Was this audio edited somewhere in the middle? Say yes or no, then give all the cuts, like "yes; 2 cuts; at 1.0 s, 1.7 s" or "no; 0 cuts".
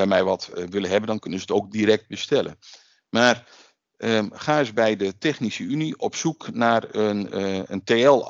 no; 0 cuts